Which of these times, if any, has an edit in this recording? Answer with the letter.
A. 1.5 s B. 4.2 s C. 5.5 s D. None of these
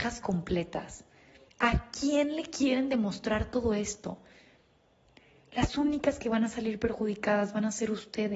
A